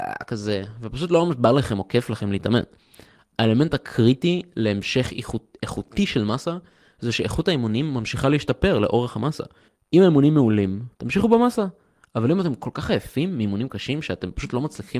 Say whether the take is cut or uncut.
cut